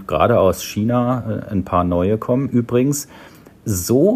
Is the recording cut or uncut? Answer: cut